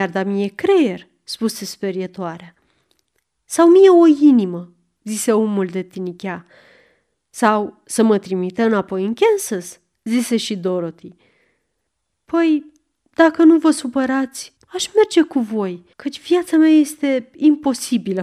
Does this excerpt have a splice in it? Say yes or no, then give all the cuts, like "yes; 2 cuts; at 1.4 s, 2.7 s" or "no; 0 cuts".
yes; 2 cuts; at 14.6 s, 15.9 s